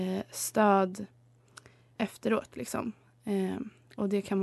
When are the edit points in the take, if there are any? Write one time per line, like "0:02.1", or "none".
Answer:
0:02.0